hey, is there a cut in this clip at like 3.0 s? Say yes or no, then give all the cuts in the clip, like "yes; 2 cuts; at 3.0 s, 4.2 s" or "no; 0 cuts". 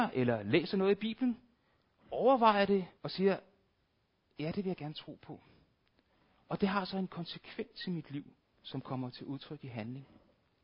yes; 1 cut; at 3.0 s